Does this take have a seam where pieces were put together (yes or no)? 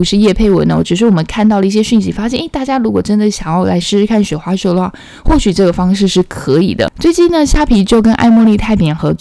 no